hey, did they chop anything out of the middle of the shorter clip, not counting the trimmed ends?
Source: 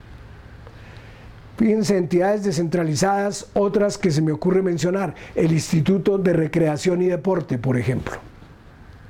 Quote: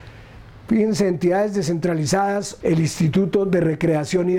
yes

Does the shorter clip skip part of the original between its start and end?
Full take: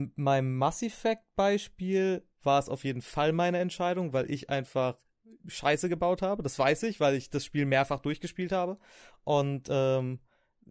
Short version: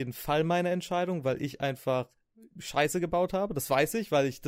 no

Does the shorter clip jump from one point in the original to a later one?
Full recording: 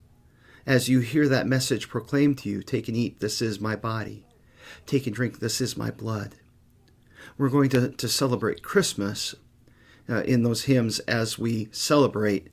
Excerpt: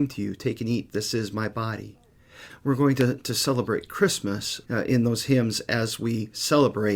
yes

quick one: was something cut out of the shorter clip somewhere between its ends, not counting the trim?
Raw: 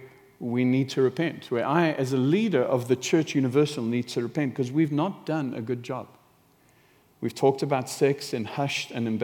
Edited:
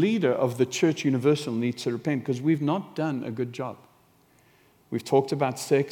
no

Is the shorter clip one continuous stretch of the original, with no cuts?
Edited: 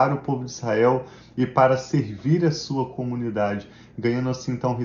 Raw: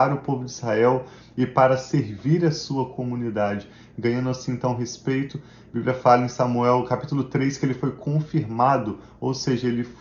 yes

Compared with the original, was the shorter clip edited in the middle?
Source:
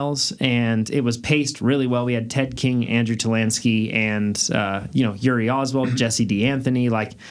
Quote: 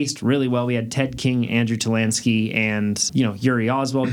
yes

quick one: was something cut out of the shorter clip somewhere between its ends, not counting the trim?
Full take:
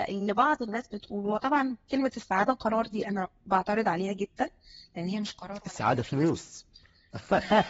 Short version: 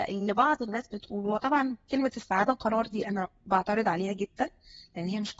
no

